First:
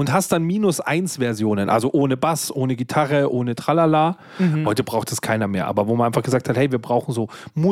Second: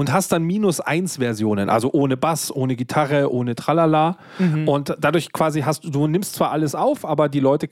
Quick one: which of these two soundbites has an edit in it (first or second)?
first